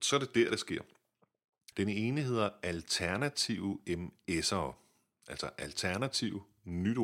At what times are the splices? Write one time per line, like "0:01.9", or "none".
0:01.7